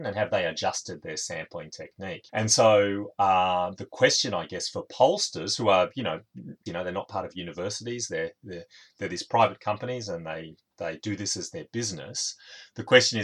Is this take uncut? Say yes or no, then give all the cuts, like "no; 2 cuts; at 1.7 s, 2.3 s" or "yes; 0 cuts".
no; 2 cuts; at 2.3 s, 6.7 s